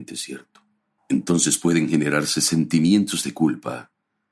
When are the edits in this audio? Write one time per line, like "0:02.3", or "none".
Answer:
0:01.0